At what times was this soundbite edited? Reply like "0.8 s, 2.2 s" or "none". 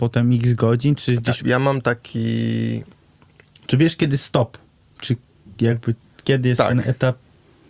1.4 s